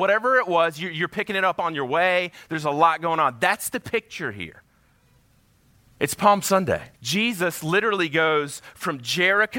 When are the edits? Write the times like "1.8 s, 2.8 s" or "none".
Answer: 6.9 s